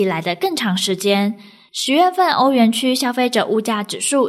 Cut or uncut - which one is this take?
cut